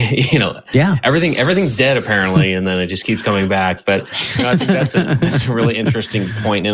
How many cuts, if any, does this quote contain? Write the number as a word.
zero